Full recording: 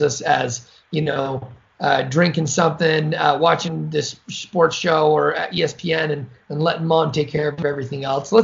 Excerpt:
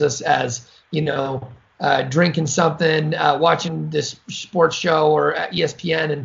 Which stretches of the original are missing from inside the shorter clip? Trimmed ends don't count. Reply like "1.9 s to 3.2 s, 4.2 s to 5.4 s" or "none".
none

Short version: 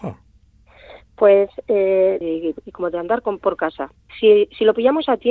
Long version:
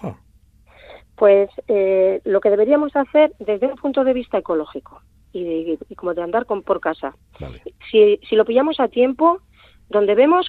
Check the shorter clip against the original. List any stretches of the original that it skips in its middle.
2.2 s to 5.4 s, 7.3 s to 7.8 s

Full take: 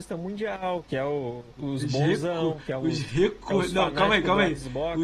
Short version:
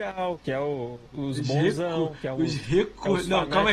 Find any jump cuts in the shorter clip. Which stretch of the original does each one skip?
none

